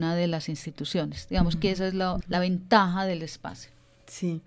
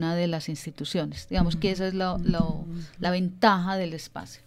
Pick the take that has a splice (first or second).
first